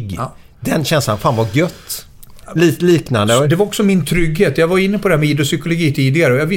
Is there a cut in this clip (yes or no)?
yes